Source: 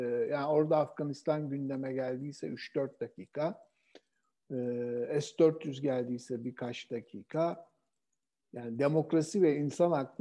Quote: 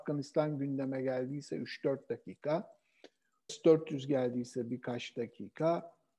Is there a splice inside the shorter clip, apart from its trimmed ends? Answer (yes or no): yes